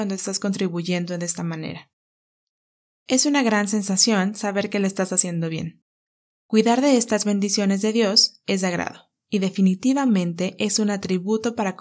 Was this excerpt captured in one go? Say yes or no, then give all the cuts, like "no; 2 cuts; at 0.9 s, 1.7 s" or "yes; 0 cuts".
no; 2 cuts; at 6.3 s, 9.2 s